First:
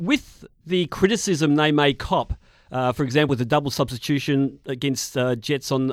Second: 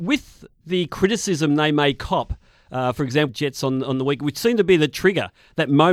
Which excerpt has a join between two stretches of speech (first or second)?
second